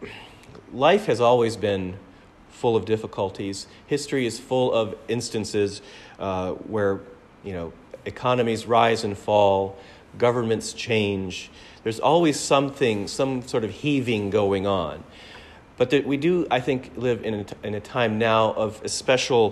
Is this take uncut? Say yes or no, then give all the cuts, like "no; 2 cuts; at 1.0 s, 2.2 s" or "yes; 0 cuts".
yes; 0 cuts